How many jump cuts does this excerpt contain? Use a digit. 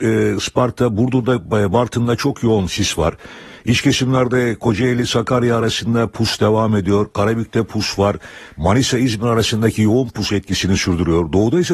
0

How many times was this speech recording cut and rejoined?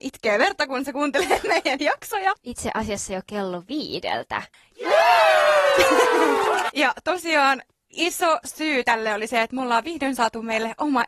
3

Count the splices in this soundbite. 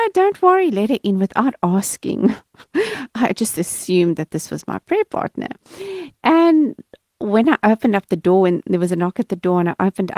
0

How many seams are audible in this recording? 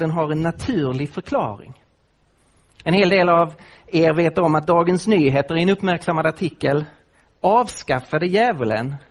0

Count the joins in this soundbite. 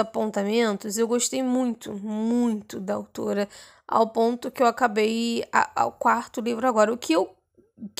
0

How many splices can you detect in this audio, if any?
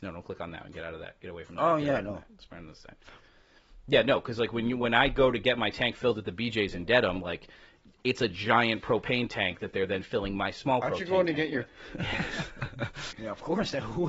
2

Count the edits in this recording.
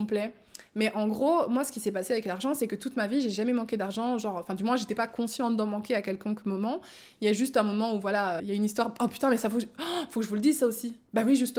1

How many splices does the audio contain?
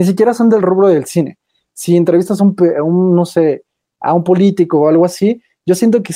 0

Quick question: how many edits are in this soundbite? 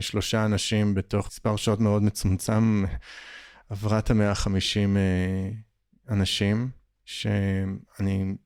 0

